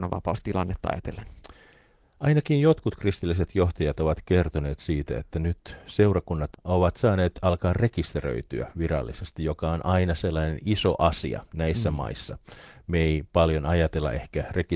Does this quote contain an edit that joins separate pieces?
no; 0 cuts

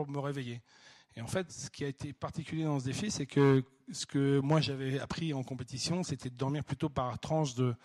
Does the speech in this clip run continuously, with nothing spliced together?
yes; 0 cuts

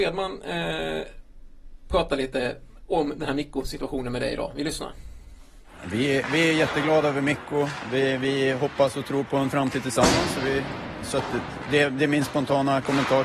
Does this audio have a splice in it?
no; 0 cuts

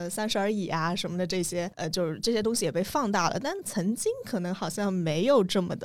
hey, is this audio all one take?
no; 1 cut; at 1.7 s

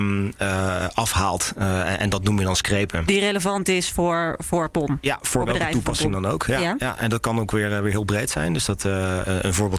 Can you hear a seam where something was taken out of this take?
no; 0 cuts

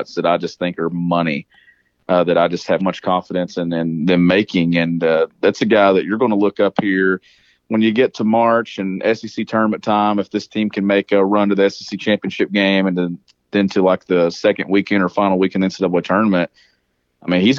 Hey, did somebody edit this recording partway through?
yes; 1 cut; at 2.8 s

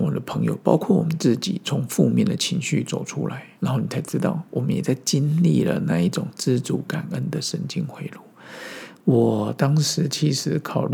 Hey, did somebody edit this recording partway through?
yes; 2 cuts; at 3.5 s, 8.9 s

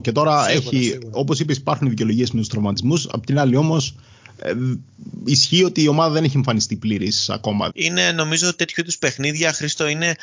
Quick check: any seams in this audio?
yes; 1 cut; at 7.7 s

